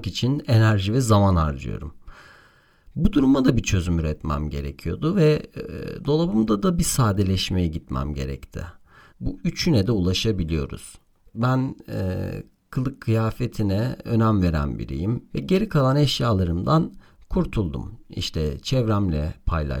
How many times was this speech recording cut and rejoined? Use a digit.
3